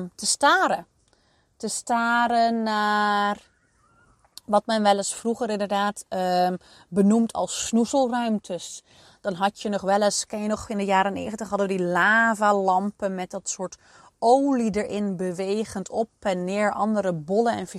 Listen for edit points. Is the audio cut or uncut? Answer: uncut